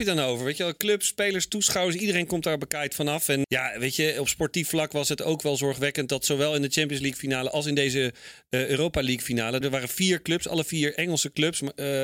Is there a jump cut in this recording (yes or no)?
yes